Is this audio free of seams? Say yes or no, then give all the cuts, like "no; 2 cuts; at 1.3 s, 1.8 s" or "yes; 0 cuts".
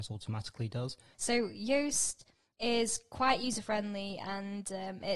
no; 1 cut; at 1.1 s